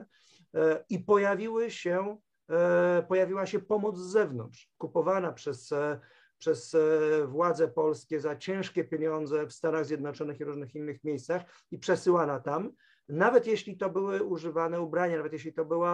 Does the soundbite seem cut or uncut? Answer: uncut